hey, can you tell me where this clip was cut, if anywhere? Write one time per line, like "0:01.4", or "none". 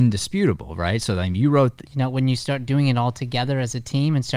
0:01.8